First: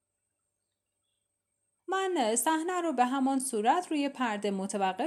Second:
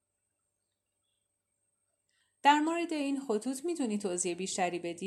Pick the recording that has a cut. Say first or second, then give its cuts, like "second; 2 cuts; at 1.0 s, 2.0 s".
first; 1 cut; at 1.8 s